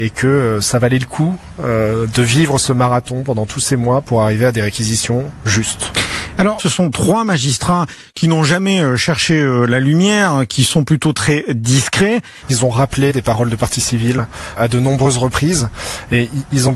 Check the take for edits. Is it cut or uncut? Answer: cut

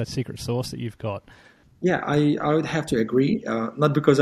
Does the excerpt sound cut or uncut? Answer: uncut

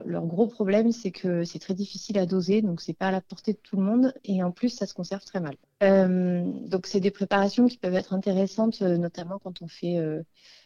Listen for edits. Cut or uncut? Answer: cut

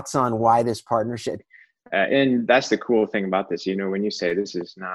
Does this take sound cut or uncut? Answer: cut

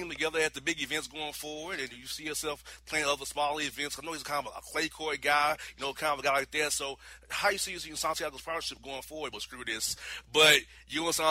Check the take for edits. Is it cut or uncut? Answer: cut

